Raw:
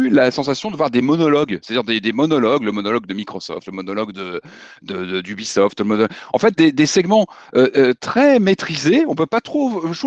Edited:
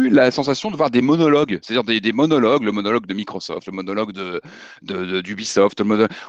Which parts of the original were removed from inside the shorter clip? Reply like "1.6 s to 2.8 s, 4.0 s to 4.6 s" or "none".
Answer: none